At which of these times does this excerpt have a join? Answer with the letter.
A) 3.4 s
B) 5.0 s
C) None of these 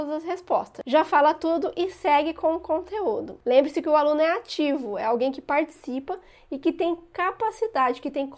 A